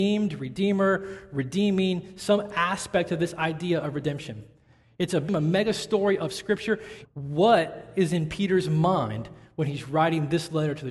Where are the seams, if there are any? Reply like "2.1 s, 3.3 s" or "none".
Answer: 5.3 s, 7.0 s